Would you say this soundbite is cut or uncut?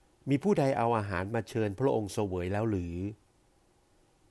uncut